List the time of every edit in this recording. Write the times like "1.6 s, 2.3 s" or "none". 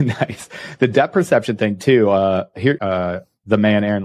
2.8 s